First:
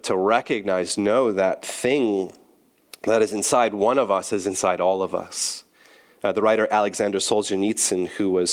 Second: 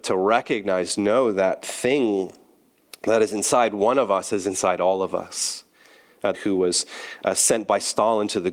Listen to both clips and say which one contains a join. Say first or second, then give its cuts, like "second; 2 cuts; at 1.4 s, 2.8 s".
second; 1 cut; at 6.3 s